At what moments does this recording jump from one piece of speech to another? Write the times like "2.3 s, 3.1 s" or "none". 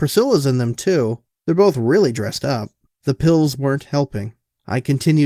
2.9 s

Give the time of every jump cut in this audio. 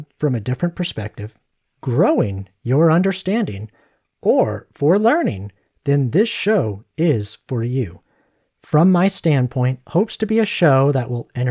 none

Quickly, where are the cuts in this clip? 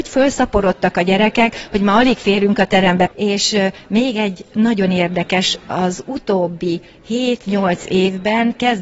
3.1 s

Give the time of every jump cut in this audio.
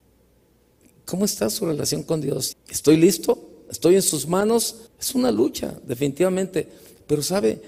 2.5 s, 4.9 s

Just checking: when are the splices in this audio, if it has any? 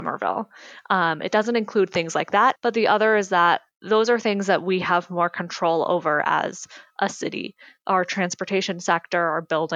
2.6 s

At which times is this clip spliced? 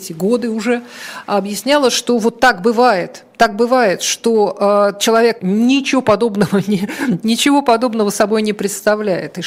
5.4 s

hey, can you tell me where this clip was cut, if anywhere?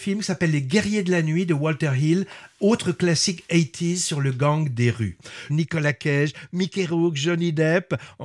5.5 s

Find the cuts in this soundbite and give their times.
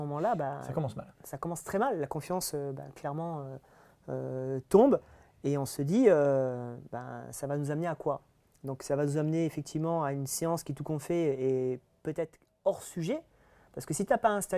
none

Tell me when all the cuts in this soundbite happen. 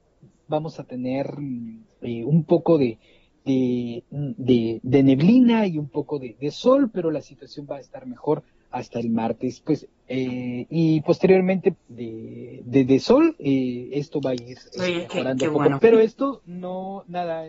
11.7 s, 15.8 s

